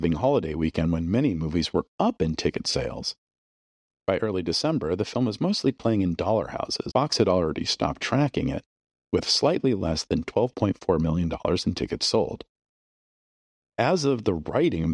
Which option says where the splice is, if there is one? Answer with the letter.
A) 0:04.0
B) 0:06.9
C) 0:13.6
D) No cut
B